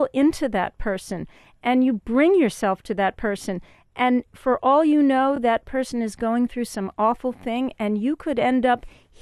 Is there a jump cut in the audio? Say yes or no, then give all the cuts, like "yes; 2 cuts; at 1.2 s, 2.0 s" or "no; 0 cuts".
no; 0 cuts